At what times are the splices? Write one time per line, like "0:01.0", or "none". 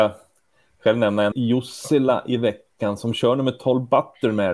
0:01.3